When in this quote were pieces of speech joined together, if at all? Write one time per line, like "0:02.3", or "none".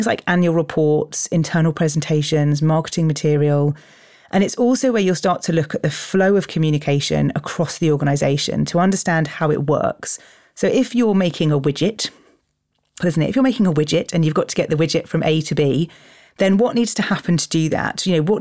0:13.0